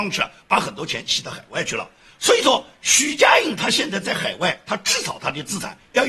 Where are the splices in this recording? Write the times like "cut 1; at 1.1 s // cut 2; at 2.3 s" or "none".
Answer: none